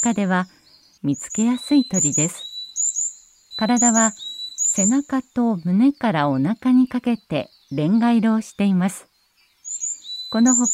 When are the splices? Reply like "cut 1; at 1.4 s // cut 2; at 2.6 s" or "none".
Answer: cut 1; at 1.0 s // cut 2; at 3.5 s